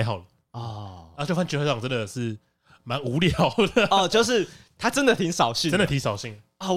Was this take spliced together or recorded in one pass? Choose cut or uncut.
uncut